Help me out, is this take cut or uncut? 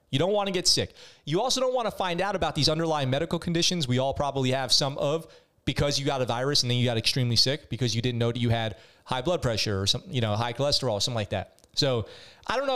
uncut